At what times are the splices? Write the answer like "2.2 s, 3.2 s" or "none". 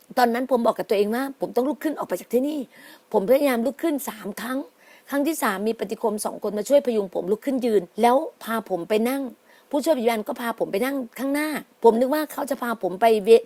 7.9 s, 11.7 s